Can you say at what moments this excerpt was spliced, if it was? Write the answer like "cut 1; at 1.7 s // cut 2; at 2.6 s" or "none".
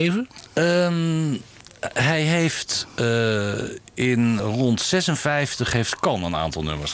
cut 1; at 4.4 s